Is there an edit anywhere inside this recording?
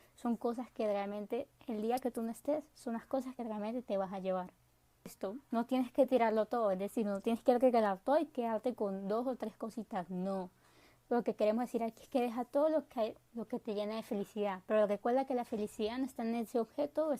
no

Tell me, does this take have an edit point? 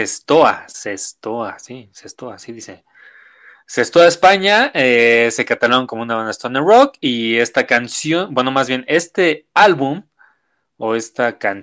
no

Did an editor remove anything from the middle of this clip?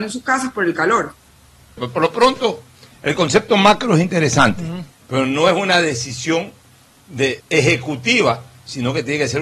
yes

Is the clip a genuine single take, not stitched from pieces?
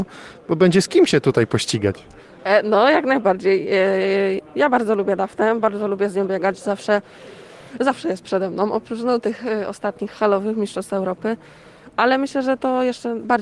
yes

